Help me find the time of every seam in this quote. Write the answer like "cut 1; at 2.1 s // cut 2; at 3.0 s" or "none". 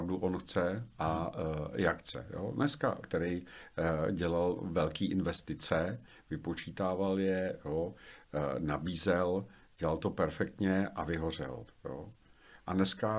cut 1; at 3.0 s